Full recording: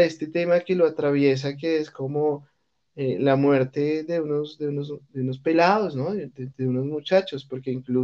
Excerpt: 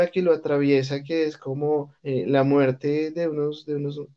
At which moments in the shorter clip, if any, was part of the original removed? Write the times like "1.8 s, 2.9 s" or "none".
2.0 s